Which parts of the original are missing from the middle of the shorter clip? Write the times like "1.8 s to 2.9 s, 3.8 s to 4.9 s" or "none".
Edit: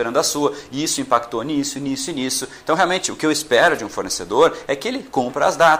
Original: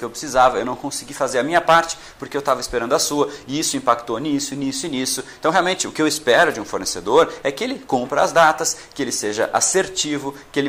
none